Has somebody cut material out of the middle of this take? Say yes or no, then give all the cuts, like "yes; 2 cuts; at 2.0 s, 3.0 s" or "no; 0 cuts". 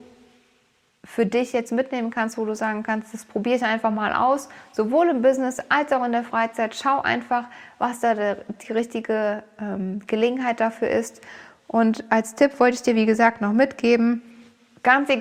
no; 0 cuts